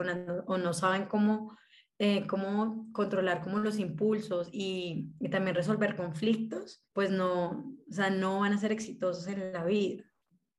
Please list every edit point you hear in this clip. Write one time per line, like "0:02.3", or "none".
0:06.9